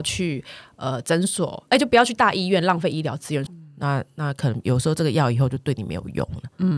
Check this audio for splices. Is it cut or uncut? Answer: cut